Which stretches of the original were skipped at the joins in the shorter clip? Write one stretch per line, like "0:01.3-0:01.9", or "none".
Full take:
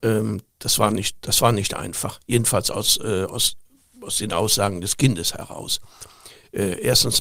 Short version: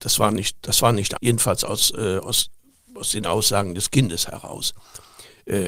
0:01.8-0:02.2